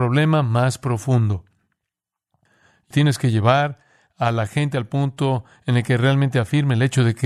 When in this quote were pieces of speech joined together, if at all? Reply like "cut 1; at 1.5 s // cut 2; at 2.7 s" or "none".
cut 1; at 2.9 s